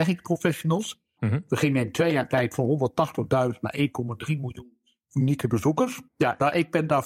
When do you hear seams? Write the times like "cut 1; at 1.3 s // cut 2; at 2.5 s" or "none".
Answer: cut 1; at 1.2 s // cut 2; at 6.1 s